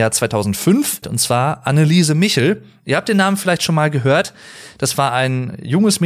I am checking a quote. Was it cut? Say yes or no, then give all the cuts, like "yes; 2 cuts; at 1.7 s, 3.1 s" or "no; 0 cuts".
yes; 1 cut; at 1.0 s